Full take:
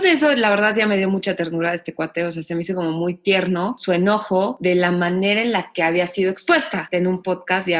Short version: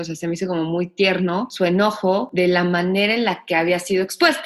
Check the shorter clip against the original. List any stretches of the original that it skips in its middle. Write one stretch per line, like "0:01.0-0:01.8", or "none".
none